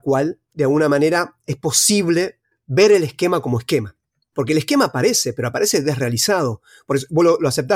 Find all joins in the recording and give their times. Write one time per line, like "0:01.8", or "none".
0:04.3